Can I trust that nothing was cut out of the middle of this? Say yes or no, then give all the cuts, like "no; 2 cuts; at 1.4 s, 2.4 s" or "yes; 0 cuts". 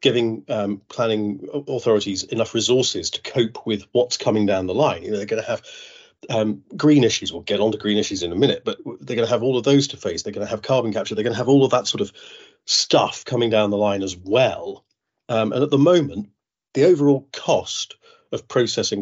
yes; 0 cuts